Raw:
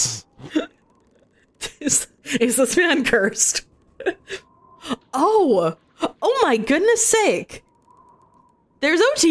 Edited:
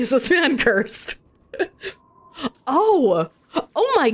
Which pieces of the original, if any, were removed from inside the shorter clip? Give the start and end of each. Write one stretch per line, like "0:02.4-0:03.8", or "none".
none